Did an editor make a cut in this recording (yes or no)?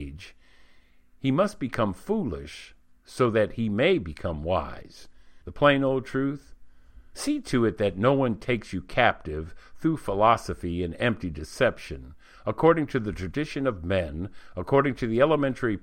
yes